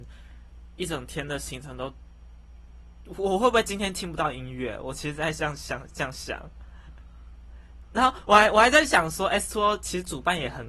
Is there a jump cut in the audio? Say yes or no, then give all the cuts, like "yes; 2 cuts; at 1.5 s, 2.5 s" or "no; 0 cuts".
no; 0 cuts